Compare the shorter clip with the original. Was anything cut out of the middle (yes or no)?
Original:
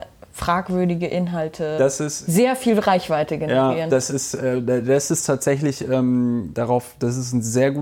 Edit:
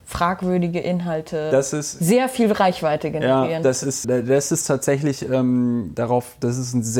yes